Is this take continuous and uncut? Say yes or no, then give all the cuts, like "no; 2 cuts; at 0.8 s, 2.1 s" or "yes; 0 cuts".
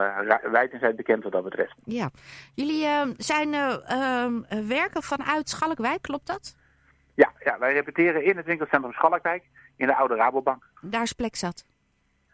no; 1 cut; at 10.8 s